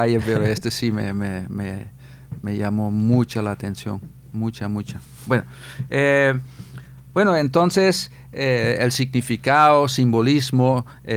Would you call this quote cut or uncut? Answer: uncut